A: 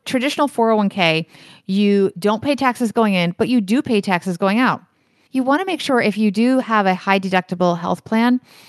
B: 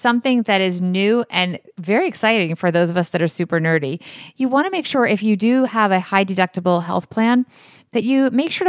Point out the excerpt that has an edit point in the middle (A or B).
A